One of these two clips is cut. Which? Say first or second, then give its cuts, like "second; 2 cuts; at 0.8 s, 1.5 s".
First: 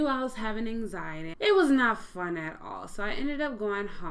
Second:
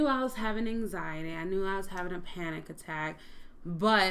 first; 1 cut; at 1.3 s